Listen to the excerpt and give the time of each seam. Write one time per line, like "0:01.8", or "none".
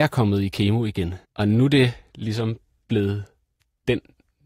0:01.2